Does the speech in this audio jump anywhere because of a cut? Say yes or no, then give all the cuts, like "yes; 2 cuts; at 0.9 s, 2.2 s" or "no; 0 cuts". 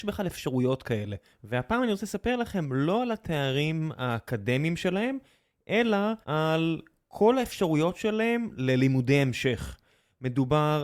yes; 2 cuts; at 1.3 s, 6.2 s